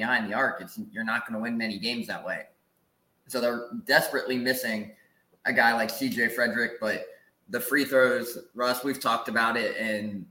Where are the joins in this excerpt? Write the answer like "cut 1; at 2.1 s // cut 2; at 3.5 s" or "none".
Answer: none